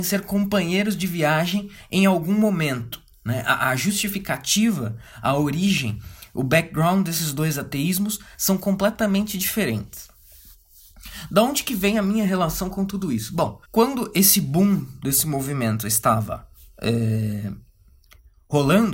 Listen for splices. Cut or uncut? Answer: cut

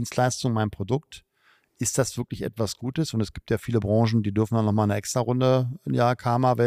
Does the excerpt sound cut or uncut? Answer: uncut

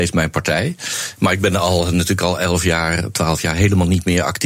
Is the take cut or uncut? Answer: uncut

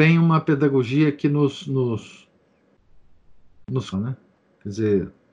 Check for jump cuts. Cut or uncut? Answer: cut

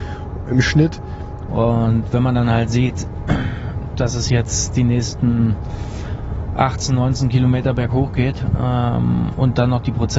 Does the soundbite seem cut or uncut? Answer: cut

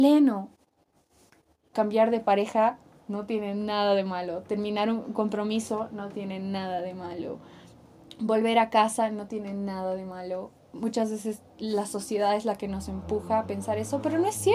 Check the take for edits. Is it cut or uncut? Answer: cut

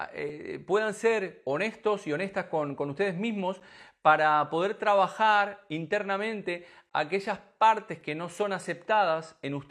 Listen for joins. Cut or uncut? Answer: uncut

